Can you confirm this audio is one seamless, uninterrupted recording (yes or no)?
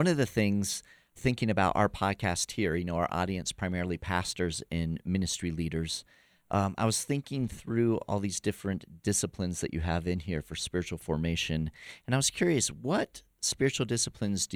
yes